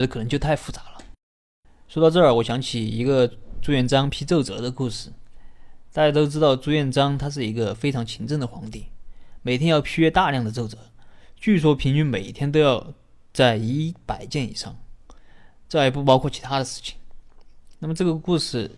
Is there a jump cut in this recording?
no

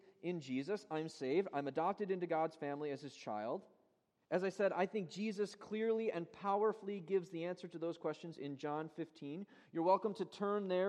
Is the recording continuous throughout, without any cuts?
no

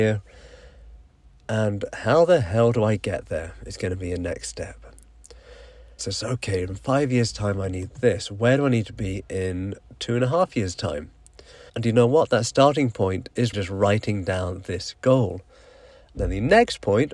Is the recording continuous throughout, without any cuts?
no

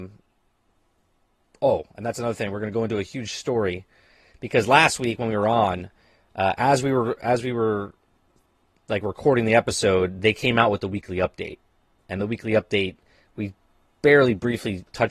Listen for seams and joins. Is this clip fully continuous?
yes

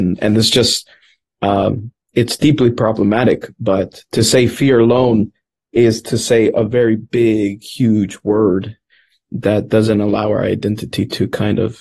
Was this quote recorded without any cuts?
yes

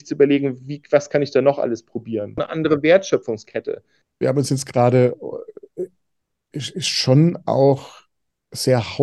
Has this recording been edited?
yes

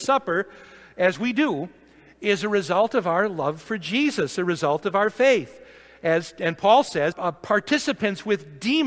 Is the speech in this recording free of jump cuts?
no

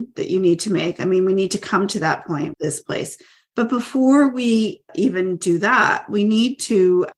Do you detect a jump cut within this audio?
yes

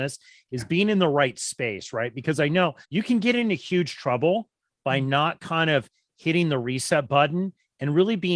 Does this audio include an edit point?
yes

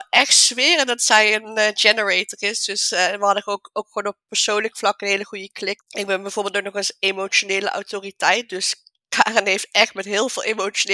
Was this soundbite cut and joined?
yes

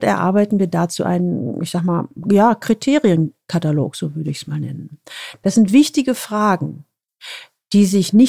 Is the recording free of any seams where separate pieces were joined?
yes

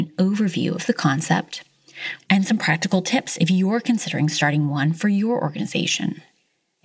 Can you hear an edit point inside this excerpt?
yes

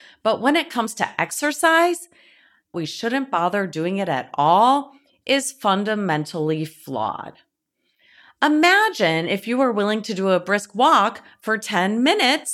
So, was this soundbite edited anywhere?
yes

